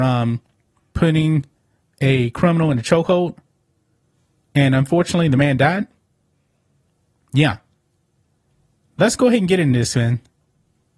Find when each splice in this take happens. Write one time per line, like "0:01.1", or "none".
none